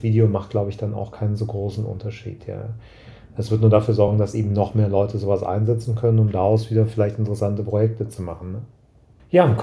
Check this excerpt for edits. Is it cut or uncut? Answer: uncut